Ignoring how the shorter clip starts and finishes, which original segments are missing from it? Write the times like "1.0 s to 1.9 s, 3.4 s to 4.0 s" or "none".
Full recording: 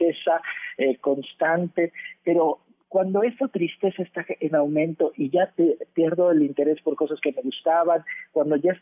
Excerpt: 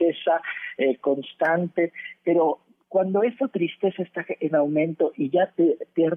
none